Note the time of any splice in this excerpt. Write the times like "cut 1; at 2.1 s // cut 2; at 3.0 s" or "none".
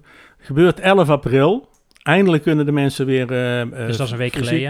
none